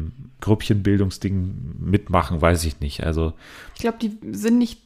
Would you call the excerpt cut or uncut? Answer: uncut